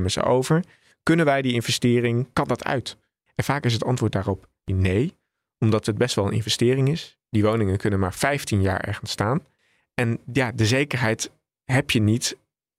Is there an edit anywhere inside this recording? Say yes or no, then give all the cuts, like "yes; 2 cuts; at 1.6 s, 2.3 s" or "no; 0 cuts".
no; 0 cuts